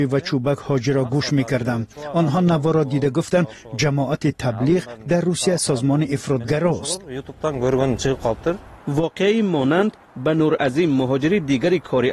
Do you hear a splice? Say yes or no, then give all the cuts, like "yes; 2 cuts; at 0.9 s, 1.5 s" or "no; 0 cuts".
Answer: yes; 1 cut; at 8.8 s